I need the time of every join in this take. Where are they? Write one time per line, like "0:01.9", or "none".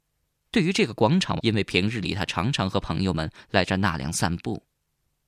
0:01.4